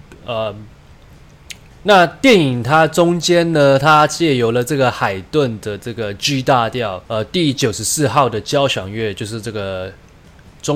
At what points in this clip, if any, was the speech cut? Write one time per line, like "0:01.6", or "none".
0:01.7
0:07.1